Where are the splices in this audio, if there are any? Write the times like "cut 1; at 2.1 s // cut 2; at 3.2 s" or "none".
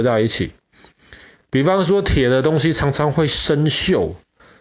none